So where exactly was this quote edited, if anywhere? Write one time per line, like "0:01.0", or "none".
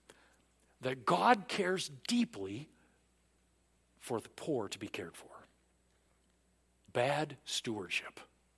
0:06.9